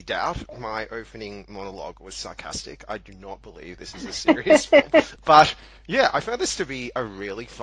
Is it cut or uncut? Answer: cut